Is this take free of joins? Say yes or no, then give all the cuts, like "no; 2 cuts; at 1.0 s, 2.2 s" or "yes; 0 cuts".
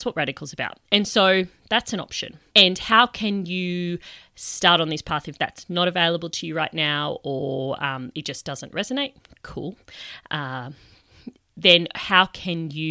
no; 1 cut; at 2.5 s